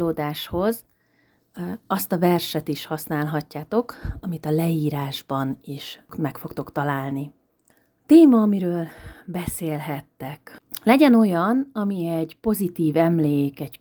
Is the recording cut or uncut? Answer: uncut